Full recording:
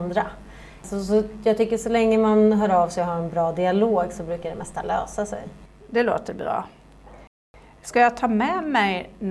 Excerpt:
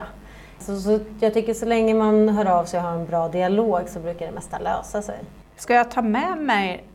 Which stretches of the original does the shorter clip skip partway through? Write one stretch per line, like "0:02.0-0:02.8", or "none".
0:05.7-0:07.7